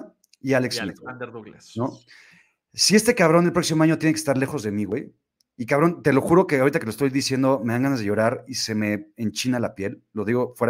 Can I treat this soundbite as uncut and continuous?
yes; 0 cuts

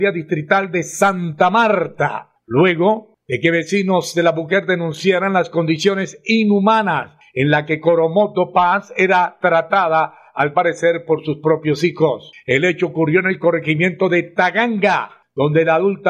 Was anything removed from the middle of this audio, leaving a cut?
no; 0 cuts

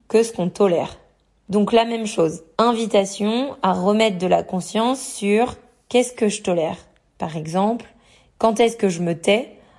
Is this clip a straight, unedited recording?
yes; 0 cuts

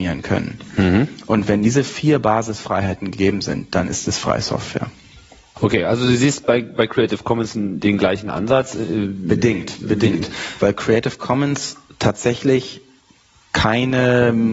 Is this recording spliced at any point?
no; 0 cuts

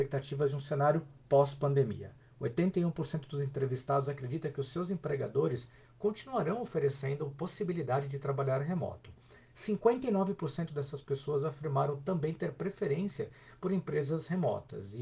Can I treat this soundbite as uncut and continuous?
yes; 0 cuts

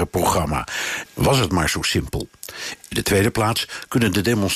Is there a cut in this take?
yes; 2 cuts; at 1.1 s, 2.8 s

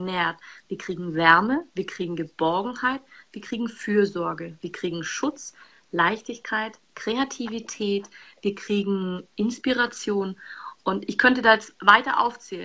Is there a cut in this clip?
no; 0 cuts

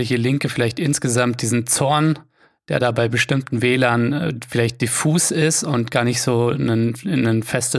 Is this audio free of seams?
yes; 0 cuts

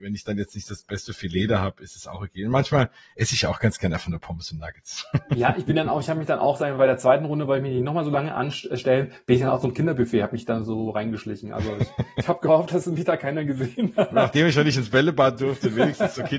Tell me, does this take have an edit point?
no; 0 cuts

